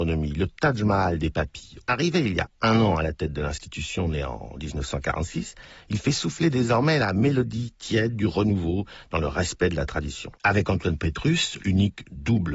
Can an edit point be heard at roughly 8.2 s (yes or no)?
no